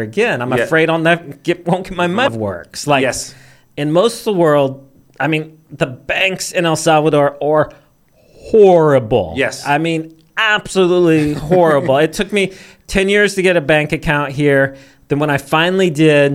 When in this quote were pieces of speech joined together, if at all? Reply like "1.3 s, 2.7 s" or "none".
2.3 s